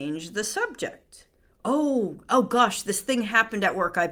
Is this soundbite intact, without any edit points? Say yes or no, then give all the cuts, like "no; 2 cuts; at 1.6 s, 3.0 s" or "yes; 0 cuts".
yes; 0 cuts